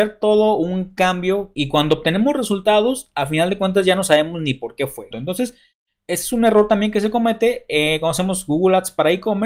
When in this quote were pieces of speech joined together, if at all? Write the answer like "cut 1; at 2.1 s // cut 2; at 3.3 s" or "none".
cut 1; at 5.1 s